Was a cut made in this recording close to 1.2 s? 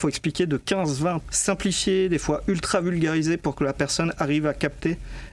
yes; 1 cut; at 1.2 s

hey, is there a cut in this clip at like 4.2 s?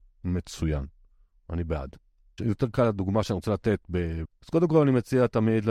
yes; 2 cuts; at 2.4 s, 4.2 s

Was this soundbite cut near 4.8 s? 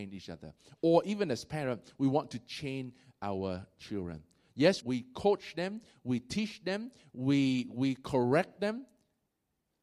yes; 1 cut; at 4.8 s

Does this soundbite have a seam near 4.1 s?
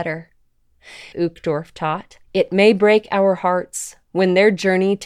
no; 2 cuts; at 1.1 s, 2.2 s

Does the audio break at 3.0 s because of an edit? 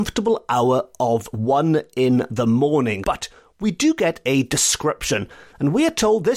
yes; 1 cut; at 3.0 s

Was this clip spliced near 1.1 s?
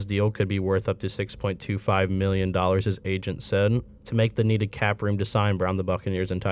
no; 1 cut; at 3.9 s

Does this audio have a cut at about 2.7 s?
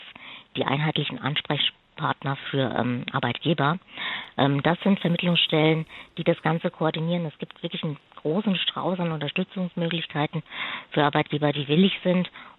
no; 0 cuts

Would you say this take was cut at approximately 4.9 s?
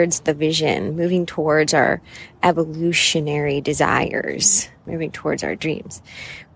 yes; 1 cut; at 4.9 s

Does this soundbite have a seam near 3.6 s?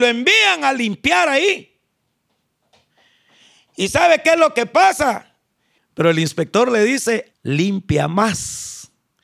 no; 2 cuts; at 5.8 s, 7.3 s

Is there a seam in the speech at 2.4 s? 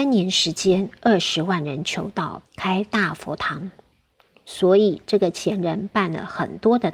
yes; 1 cut; at 2.4 s

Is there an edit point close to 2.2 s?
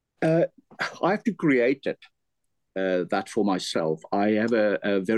no; 0 cuts

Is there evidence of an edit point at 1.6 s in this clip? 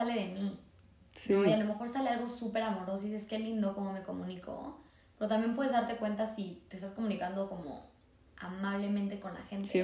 no; 0 cuts

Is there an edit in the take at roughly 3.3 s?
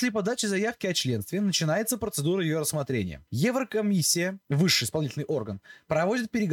yes; 1 cut; at 3.3 s

